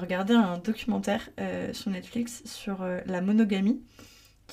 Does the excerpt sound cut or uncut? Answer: uncut